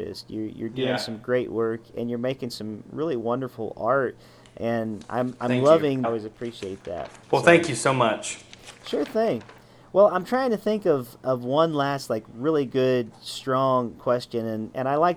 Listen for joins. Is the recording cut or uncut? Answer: cut